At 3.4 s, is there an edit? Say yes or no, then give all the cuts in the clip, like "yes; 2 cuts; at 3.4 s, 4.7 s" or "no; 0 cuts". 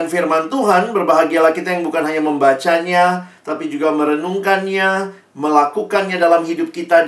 no; 0 cuts